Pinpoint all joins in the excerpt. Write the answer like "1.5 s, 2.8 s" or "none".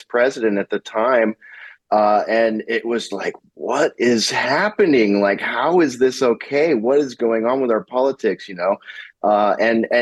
3.1 s